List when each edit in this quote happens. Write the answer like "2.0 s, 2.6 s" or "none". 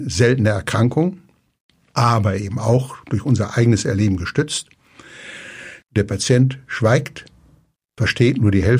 5.8 s